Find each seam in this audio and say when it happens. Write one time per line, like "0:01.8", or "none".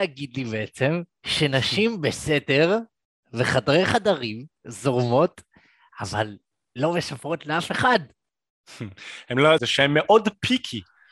0:09.6

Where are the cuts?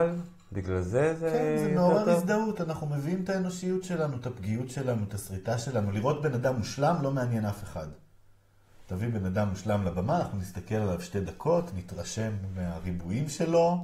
none

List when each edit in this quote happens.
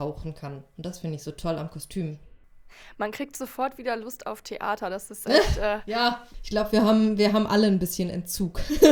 none

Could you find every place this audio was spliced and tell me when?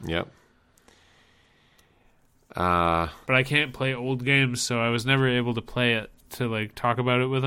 0:03.2
0:06.2

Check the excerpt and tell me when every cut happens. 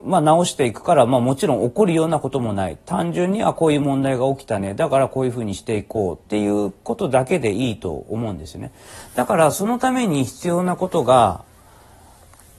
none

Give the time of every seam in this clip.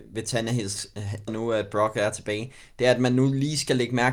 0:01.3

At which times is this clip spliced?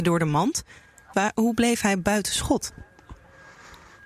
0:01.1

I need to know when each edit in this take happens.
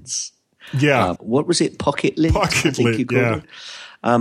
0:01.2

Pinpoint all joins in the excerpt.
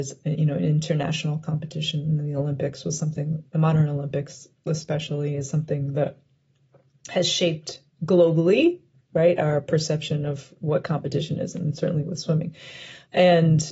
none

